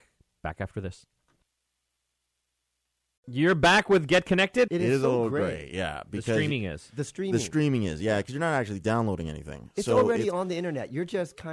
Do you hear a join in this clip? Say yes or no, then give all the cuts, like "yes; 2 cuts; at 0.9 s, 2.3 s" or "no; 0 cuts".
yes; 1 cut; at 4.7 s